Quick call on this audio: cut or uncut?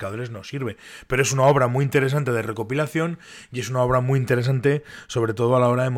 uncut